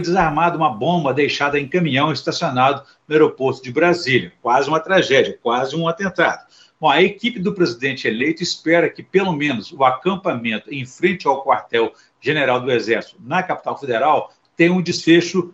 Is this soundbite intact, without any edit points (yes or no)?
yes